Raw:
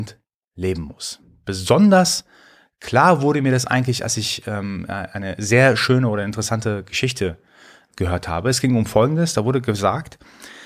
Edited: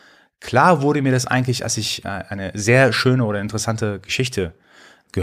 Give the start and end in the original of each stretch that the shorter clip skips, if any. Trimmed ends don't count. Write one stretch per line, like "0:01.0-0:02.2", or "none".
0:04.4-0:04.9